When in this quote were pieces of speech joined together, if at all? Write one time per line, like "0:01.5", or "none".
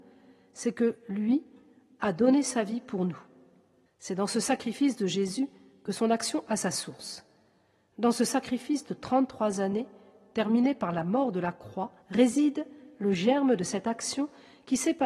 0:03.9
0:12.0